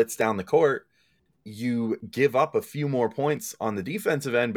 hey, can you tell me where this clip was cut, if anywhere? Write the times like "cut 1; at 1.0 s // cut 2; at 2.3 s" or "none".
cut 1; at 1.4 s